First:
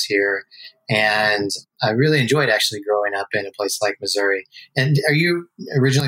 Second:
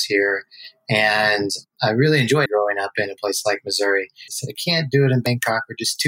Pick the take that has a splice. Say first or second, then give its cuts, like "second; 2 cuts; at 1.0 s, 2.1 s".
second; 2 cuts; at 2.5 s, 4.3 s